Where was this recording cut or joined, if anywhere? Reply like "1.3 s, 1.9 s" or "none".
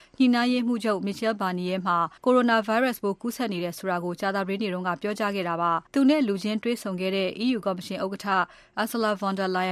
2.2 s, 5.9 s